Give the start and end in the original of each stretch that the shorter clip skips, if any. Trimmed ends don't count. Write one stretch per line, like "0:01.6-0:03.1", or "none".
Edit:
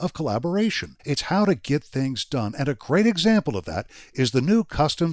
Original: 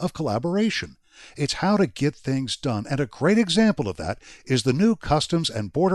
0:01.0-0:01.3